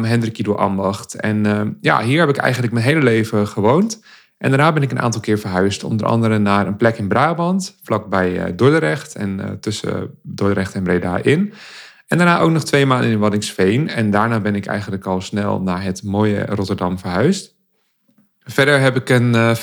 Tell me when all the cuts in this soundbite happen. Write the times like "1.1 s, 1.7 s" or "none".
none